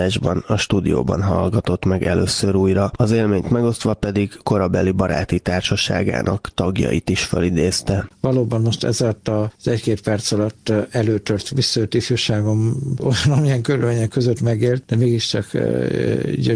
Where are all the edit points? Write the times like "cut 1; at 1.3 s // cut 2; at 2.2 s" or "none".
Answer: cut 1; at 8.1 s